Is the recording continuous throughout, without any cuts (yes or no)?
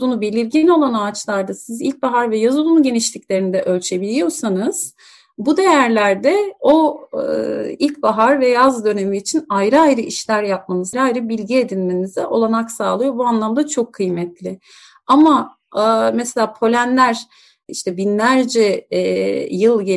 no